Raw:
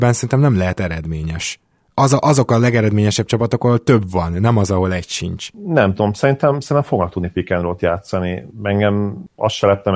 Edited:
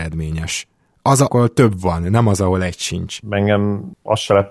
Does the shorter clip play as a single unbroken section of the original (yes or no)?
no